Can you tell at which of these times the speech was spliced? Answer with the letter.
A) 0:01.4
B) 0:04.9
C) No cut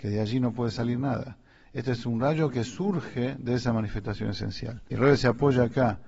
B